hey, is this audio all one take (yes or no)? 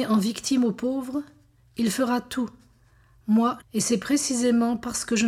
no